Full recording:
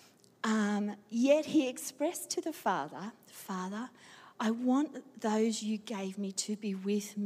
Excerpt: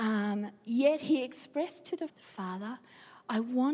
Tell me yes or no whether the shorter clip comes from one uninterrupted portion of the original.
no